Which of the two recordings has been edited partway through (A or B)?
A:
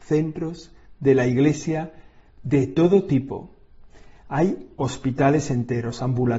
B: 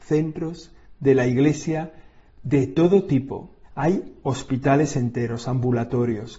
B